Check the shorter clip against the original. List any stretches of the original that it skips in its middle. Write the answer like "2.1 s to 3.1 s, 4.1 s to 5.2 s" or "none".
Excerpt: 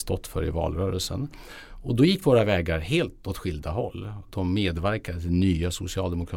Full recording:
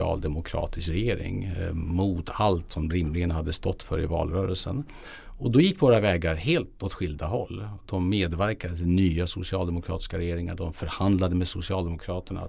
none